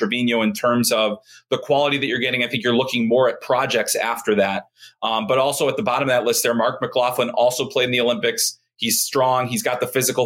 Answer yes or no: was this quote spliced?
no